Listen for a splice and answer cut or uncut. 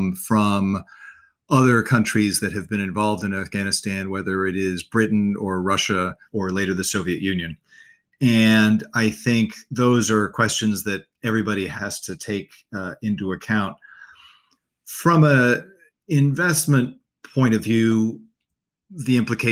uncut